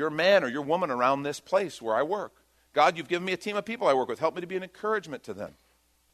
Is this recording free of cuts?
yes; 0 cuts

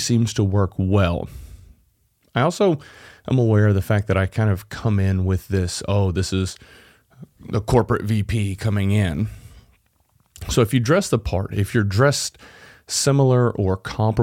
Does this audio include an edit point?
no; 0 cuts

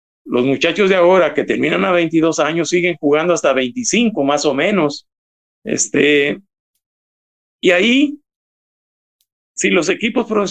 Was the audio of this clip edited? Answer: yes; 1 cut; at 5.6 s

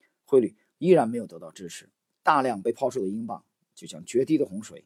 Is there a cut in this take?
no; 0 cuts

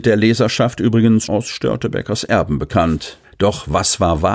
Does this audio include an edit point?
yes; 2 cuts; at 1.2 s, 3.2 s

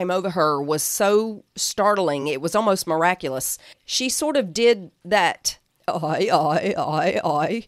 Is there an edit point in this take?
no; 0 cuts

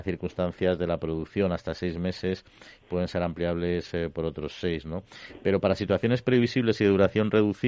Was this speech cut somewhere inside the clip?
no; 0 cuts

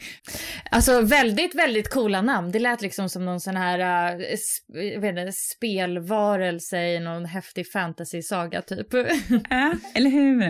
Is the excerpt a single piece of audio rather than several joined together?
yes; 0 cuts

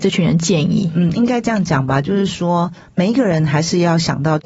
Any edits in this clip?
no; 0 cuts

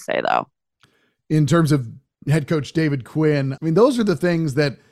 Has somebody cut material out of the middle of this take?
yes; 1 cut; at 3.6 s

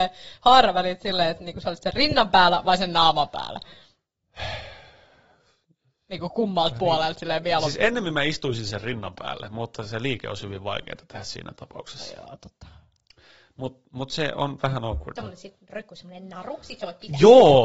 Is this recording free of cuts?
no; 1 cut; at 15.2 s

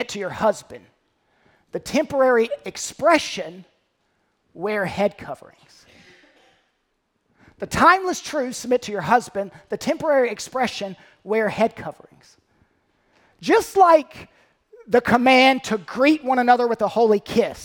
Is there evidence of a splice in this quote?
no; 0 cuts

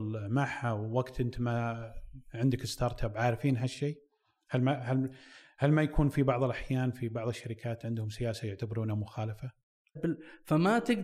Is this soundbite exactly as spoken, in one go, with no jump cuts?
no; 1 cut; at 10.0 s

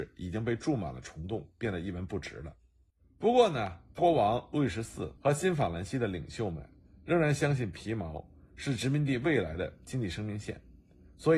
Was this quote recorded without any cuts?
no; 2 cuts; at 4.0 s, 5.2 s

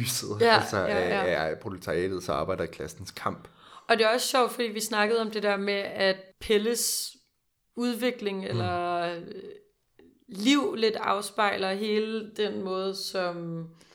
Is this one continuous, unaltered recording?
yes; 0 cuts

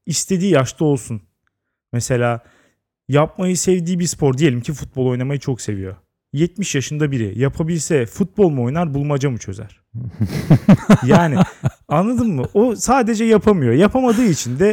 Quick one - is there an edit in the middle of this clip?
no; 0 cuts

